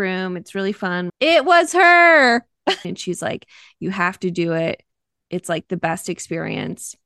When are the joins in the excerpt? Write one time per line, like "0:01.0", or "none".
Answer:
0:01.1
0:02.8